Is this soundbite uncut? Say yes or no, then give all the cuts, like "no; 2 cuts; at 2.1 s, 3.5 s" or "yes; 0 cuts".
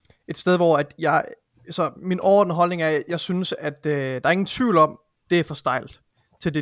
no; 1 cut; at 5.2 s